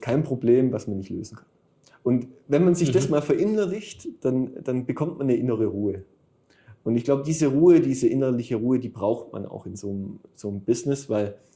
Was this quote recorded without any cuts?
yes; 0 cuts

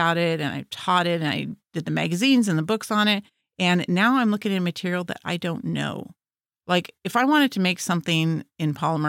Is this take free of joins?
yes; 0 cuts

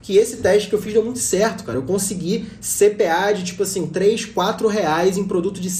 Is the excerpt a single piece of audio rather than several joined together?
yes; 0 cuts

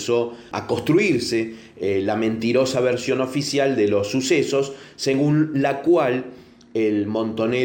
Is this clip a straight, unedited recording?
yes; 0 cuts

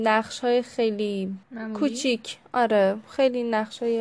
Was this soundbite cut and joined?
yes; 1 cut; at 1.4 s

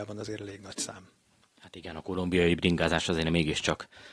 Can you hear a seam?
no; 0 cuts

